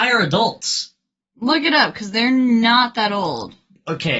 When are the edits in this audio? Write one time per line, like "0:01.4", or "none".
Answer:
0:01.2